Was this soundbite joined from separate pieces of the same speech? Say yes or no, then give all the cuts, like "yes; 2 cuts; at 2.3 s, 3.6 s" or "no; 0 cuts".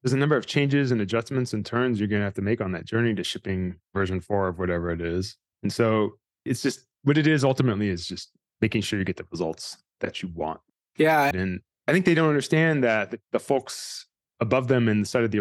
yes; 2 cuts; at 5.5 s, 11.3 s